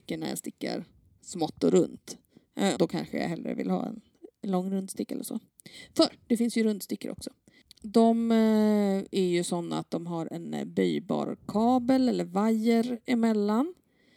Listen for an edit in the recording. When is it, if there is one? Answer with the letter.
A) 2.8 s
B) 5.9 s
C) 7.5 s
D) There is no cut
A